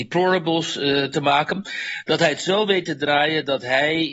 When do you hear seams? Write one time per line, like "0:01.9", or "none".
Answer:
none